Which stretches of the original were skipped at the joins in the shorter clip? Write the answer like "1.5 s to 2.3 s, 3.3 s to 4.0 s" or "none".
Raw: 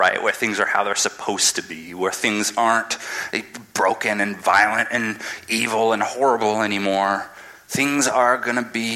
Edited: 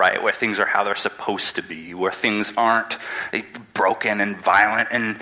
none